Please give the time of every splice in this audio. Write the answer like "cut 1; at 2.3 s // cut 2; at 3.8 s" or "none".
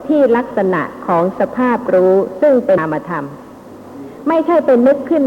cut 1; at 2.8 s

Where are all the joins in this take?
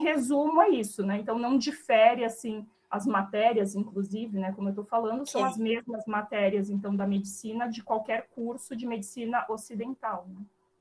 none

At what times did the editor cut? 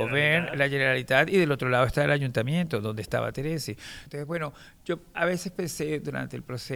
cut 1; at 4.1 s

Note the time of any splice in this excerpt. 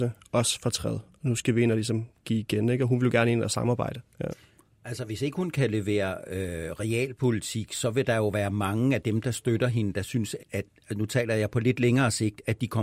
cut 1; at 4.1 s // cut 2; at 10.4 s

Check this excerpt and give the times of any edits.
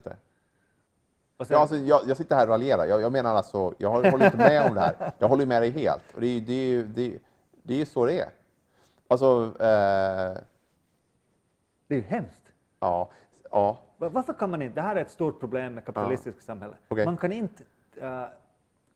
none

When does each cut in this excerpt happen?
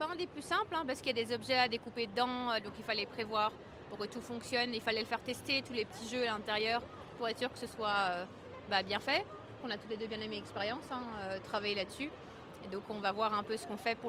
none

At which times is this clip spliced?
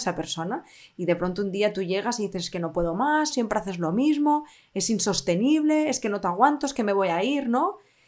cut 1; at 3.3 s

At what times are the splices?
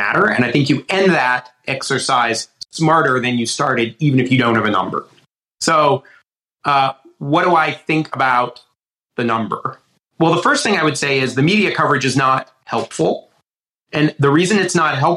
none

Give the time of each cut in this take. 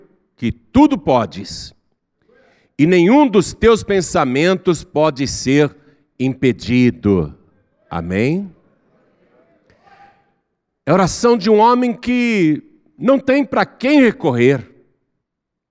none

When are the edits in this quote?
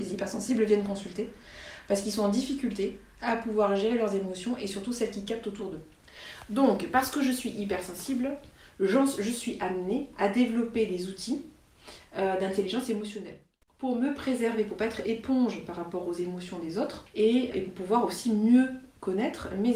cut 1; at 17.5 s

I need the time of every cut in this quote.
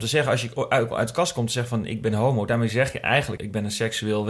cut 1; at 3.4 s

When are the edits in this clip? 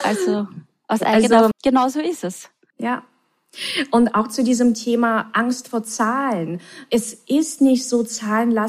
cut 1; at 1.5 s

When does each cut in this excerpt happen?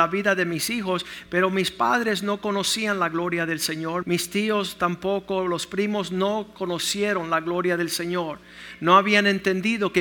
cut 1; at 4.0 s

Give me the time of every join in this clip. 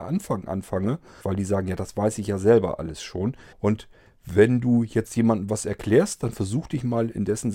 cut 1; at 1.2 s // cut 2; at 3.5 s

